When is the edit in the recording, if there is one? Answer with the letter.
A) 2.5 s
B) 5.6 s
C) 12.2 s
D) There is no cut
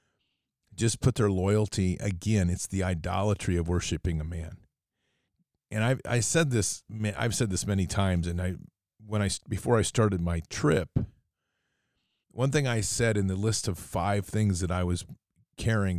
C